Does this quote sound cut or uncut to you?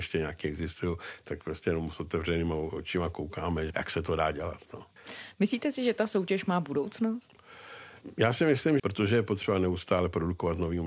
cut